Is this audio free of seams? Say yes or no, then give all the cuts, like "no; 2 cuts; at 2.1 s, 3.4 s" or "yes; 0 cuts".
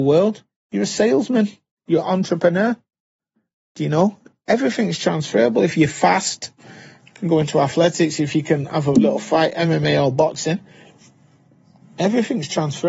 yes; 0 cuts